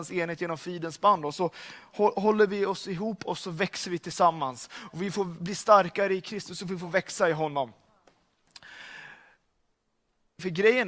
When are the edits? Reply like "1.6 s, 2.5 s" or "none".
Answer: none